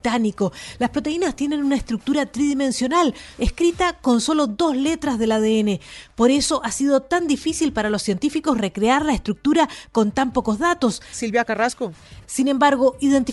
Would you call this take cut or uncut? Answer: cut